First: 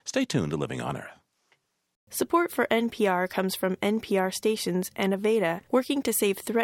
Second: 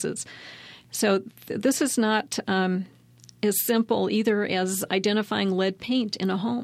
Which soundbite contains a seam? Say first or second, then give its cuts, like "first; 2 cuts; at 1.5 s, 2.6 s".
first; 1 cut; at 5.6 s